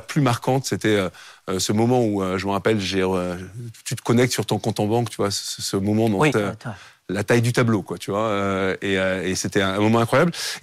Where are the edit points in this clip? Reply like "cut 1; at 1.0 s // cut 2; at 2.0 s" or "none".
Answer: cut 1; at 6.3 s